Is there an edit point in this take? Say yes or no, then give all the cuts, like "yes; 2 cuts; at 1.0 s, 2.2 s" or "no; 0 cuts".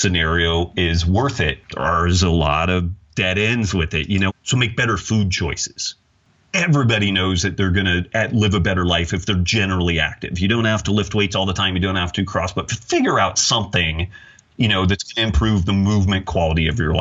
yes; 1 cut; at 4.3 s